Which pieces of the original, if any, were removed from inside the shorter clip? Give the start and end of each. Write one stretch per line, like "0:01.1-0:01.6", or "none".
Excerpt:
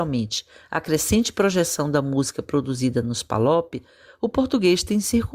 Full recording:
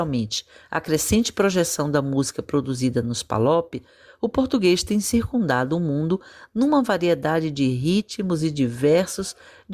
none